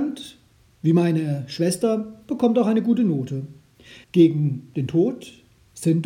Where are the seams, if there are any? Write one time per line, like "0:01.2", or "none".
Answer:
0:04.0